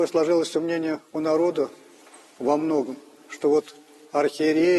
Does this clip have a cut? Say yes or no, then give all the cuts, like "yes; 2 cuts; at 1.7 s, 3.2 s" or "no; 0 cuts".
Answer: no; 0 cuts